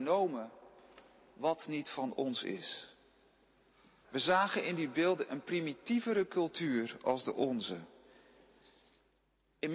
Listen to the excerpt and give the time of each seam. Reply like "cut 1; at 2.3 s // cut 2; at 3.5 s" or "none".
cut 1; at 4.0 s

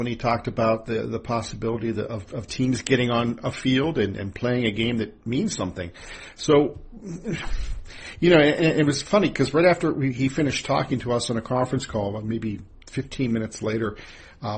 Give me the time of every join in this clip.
none

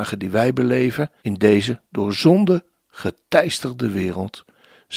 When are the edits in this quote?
cut 1; at 1.2 s

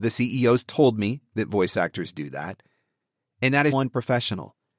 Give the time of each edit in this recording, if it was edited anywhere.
cut 1; at 3.7 s

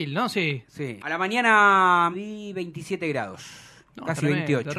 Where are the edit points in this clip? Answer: cut 1; at 1.0 s // cut 2; at 2.1 s

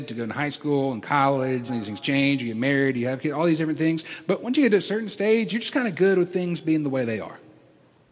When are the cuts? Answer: cut 1; at 1.7 s

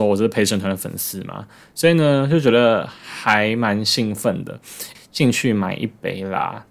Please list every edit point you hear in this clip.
cut 1; at 4.9 s

